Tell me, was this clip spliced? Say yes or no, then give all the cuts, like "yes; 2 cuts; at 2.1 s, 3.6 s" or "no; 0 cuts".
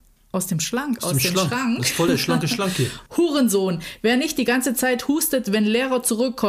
yes; 1 cut; at 3.1 s